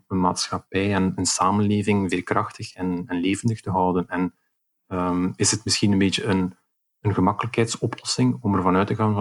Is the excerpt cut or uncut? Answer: uncut